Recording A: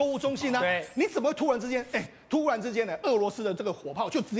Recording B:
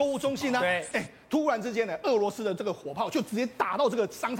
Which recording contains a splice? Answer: B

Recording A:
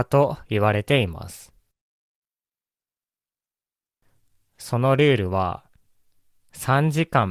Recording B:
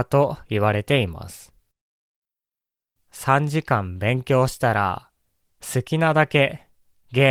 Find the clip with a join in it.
B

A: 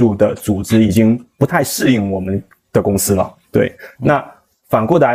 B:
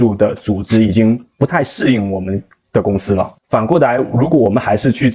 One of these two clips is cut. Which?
B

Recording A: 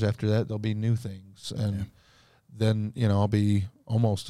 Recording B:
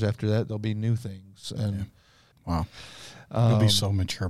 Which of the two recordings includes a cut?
B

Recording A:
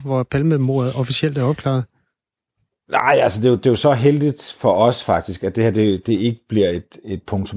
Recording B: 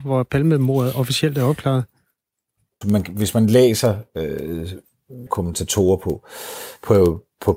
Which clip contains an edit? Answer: B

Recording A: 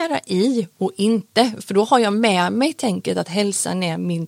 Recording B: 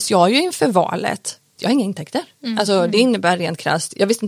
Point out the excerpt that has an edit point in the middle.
B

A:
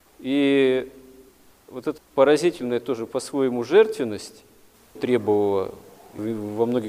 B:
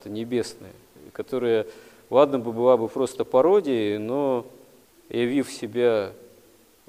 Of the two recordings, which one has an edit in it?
A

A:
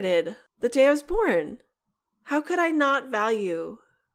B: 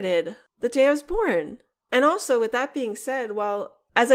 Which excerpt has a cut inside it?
B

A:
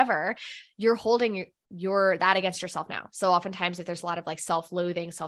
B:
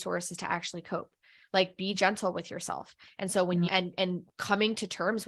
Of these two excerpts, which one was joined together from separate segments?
B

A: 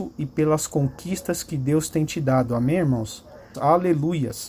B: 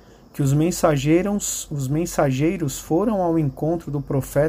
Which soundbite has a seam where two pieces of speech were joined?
A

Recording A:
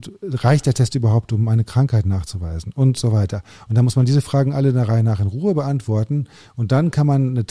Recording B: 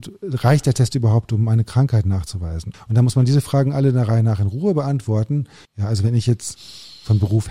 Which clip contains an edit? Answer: B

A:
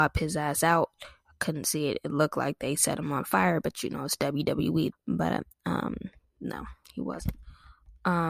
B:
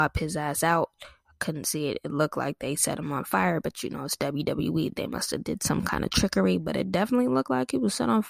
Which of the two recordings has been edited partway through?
A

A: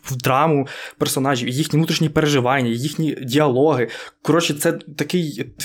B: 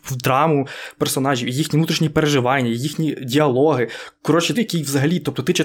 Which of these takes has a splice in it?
B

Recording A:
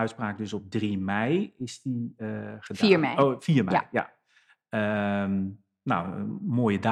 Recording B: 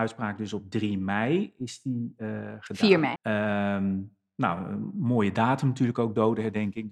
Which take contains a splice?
B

